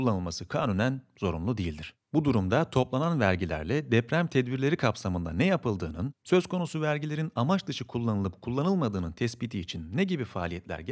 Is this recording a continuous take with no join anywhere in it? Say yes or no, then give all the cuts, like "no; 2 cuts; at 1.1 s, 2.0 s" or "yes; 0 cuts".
no; 1 cut; at 2.1 s